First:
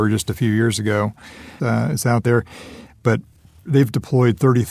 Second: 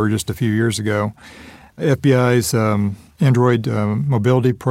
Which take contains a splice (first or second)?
first